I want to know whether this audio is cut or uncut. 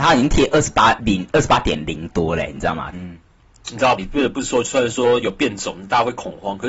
cut